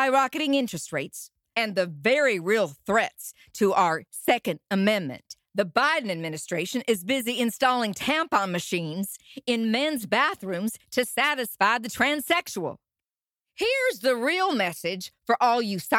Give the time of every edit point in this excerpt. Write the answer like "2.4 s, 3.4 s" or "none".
1.5 s, 5.5 s